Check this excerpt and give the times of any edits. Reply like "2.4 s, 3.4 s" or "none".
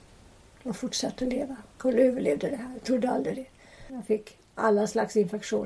1.7 s, 3.9 s